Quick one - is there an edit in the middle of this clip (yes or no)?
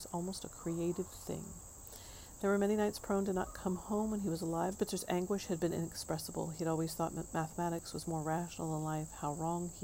yes